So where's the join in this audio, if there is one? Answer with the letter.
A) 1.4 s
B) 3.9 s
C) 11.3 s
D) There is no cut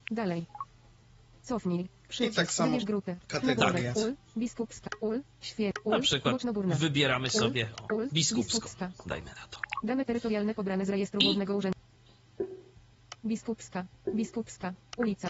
B